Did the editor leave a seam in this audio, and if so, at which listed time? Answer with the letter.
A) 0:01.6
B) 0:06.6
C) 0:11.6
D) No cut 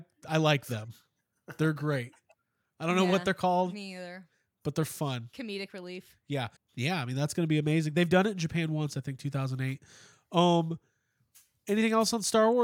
B